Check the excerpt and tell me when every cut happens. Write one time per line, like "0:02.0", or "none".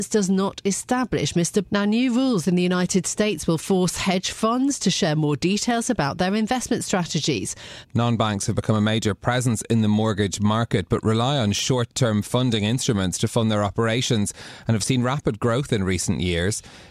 0:01.6
0:07.8